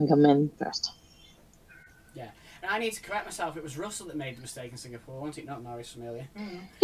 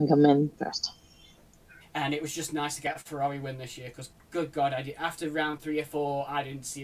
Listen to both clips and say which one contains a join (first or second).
second